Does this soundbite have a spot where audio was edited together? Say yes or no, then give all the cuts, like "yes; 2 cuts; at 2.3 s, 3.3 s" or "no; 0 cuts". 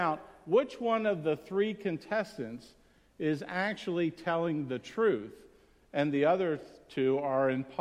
no; 0 cuts